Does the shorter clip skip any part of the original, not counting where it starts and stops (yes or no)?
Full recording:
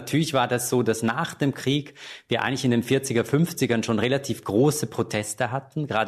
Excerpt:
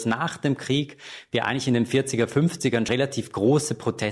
yes